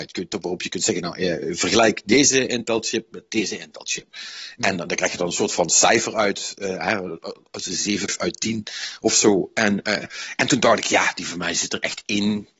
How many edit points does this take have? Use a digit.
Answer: 1